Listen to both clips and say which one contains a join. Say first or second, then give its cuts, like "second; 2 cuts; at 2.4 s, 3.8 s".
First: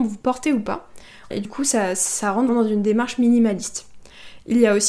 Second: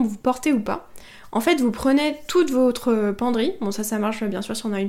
first; 2 cuts; at 1.3 s, 2.5 s